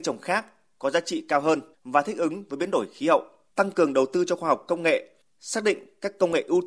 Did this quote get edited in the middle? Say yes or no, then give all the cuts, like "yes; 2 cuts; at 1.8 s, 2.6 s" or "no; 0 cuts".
yes; 2 cuts; at 1.7 s, 3.5 s